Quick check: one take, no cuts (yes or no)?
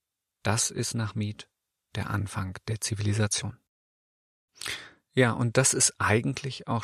yes